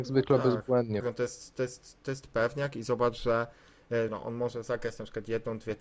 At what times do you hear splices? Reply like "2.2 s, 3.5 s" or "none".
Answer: 1.0 s, 4.1 s